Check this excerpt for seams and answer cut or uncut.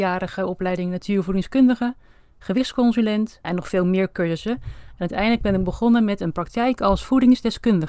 cut